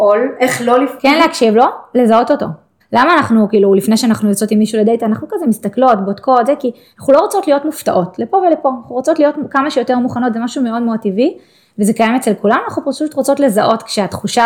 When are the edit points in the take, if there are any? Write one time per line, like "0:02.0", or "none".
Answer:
0:01.0
0:02.8

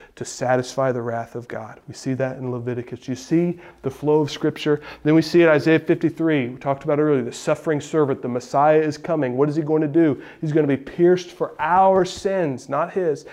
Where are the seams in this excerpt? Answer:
none

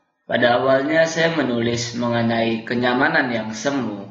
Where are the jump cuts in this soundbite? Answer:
none

